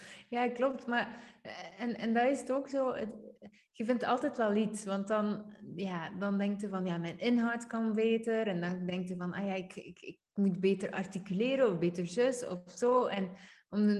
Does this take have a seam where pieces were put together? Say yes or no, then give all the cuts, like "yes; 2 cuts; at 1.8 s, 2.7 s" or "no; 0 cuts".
no; 0 cuts